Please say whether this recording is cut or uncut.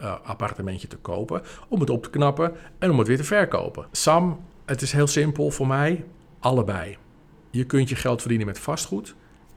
cut